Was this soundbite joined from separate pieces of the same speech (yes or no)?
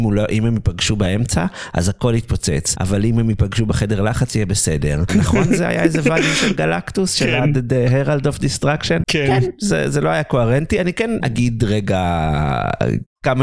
yes